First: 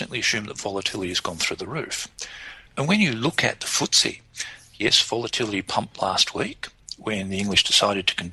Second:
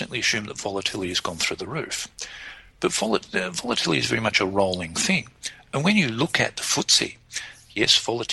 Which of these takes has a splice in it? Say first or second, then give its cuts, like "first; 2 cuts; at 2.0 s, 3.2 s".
first; 1 cut; at 2.7 s